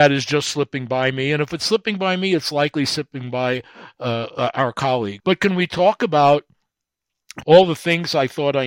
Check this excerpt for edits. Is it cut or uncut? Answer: cut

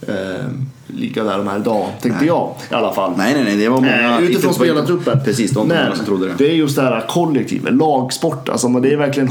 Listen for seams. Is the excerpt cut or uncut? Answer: uncut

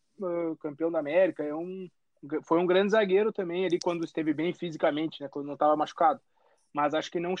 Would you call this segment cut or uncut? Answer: uncut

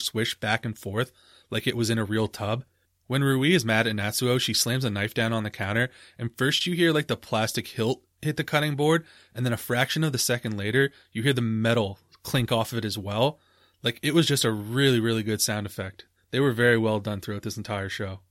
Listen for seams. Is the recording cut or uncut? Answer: uncut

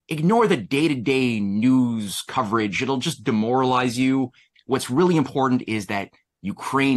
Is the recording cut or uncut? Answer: cut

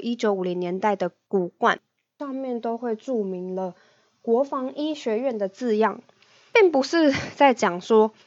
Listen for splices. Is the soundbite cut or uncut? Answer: uncut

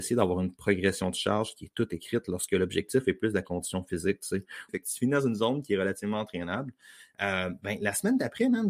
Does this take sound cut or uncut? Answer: cut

